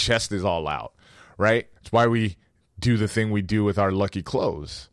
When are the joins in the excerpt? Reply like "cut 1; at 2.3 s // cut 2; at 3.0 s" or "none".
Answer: cut 1; at 1.8 s